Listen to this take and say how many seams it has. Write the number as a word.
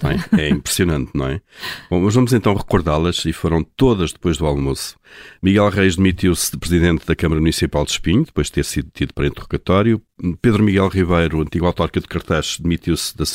zero